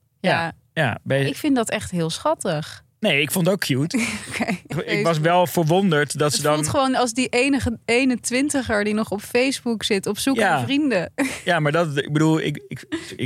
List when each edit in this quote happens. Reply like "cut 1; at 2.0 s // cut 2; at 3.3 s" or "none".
cut 1; at 4.7 s